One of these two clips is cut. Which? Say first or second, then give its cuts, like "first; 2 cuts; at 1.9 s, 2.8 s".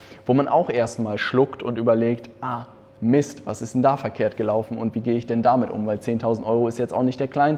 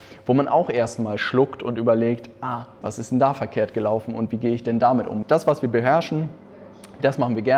second; 2 cuts; at 2.8 s, 5.2 s